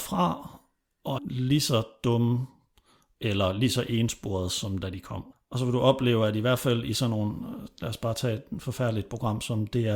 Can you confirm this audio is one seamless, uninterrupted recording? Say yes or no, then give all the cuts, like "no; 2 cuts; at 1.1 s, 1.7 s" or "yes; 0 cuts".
no; 2 cuts; at 1.2 s, 5.3 s